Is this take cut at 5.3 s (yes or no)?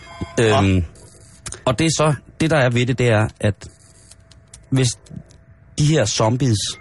no